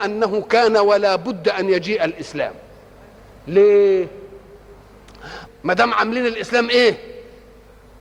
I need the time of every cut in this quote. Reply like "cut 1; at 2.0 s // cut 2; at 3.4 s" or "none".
cut 1; at 5.5 s

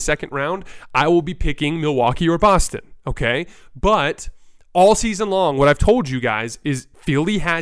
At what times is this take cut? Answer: none

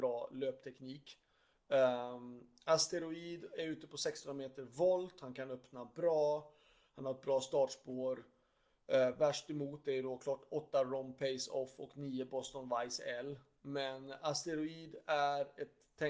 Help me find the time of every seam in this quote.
none

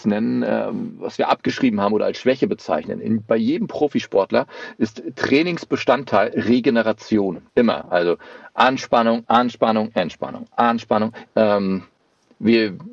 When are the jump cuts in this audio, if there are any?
cut 1; at 7.5 s // cut 2; at 9.2 s // cut 3; at 11.2 s

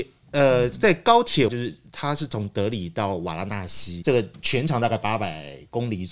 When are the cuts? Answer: cut 1; at 1.5 s // cut 2; at 4.0 s

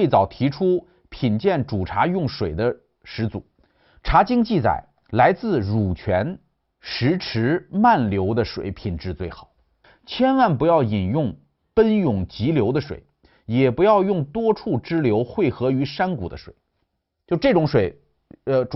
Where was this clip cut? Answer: cut 1; at 4.0 s

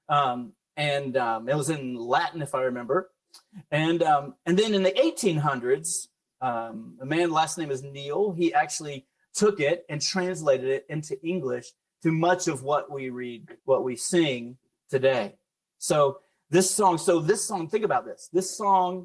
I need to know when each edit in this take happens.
cut 1; at 13.6 s

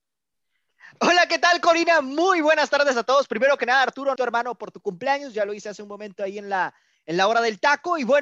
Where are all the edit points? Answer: cut 1; at 4.2 s

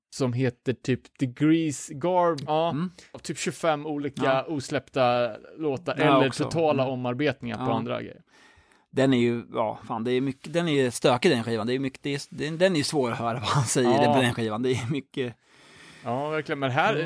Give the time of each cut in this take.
cut 1; at 2.5 s

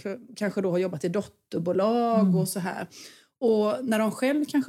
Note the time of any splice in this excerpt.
none

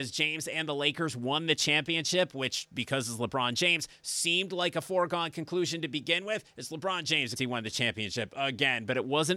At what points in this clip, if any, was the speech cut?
cut 1; at 7.4 s

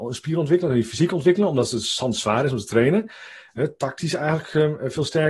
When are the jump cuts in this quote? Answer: none

